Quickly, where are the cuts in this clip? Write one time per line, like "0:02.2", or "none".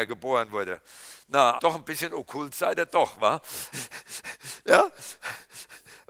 0:01.6
0:03.7